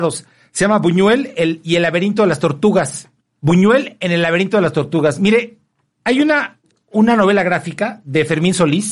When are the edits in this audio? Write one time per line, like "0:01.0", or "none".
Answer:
none